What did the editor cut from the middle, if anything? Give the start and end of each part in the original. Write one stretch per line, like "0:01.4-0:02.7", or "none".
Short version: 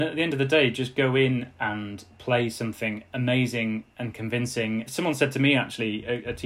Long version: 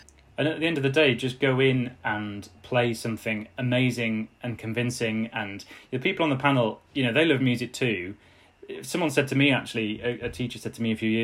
0:05.3-0:08.8